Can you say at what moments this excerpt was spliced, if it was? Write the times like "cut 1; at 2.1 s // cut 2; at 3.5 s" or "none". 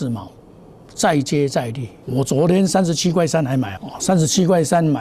cut 1; at 2.0 s // cut 2; at 3.8 s